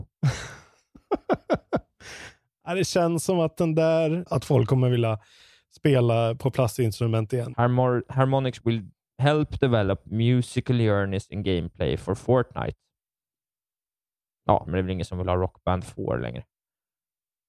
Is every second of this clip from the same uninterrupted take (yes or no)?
no